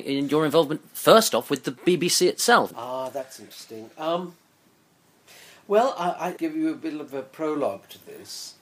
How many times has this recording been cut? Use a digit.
2